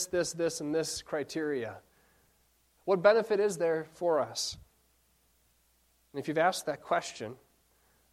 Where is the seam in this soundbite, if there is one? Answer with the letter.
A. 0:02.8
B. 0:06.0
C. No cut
A